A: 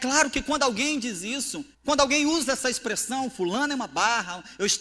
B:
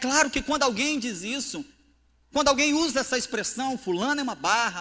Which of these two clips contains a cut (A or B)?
A